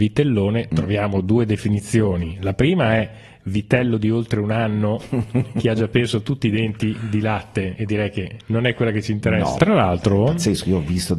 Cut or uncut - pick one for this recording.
cut